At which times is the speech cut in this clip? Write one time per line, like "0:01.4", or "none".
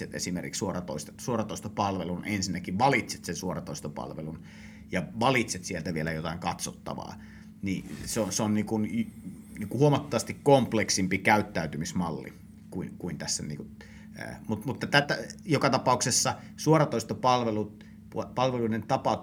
0:15.0